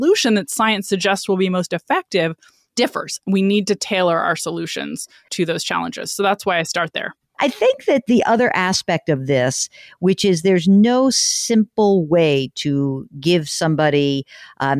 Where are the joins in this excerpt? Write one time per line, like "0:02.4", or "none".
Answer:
none